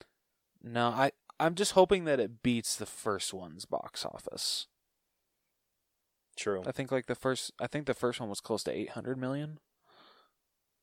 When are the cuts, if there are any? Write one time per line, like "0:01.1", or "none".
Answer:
none